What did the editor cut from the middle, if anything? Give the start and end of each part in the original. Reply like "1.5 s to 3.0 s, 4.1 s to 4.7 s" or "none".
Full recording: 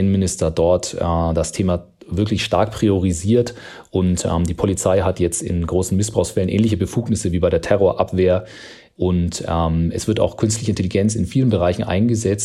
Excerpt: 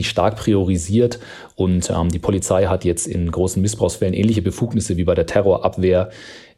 none